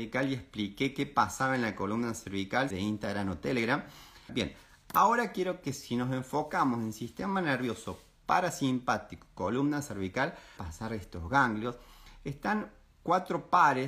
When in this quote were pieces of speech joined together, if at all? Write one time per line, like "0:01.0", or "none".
0:02.7
0:04.3
0:10.6